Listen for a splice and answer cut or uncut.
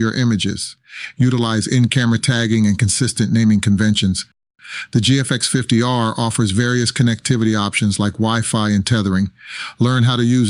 cut